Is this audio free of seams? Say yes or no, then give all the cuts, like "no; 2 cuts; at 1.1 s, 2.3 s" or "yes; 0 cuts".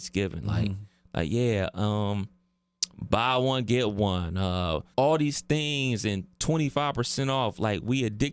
no; 1 cut; at 4.9 s